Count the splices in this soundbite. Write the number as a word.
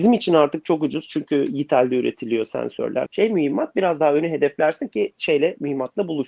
one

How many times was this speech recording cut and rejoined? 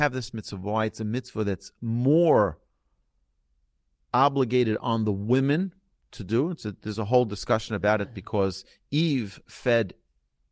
zero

